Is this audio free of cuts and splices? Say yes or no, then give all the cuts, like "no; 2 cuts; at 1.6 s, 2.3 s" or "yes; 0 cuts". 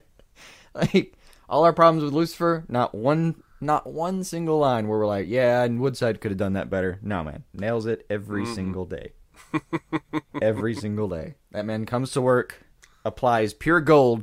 yes; 0 cuts